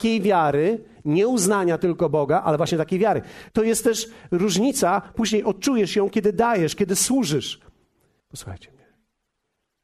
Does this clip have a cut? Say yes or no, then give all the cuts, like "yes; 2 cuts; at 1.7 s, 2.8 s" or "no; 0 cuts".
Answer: yes; 1 cut; at 8.2 s